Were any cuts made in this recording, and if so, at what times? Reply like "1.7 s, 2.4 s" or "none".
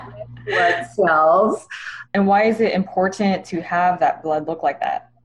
2.0 s